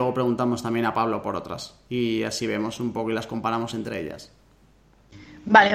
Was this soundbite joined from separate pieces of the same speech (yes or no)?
no